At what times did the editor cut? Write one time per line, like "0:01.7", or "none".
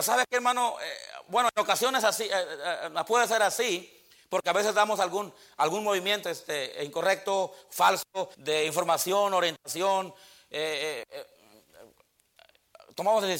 0:06.2
0:08.3